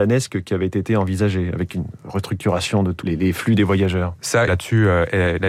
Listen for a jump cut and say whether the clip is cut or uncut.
cut